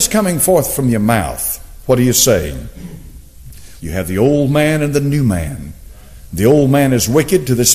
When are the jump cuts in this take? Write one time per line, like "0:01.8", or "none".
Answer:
0:03.8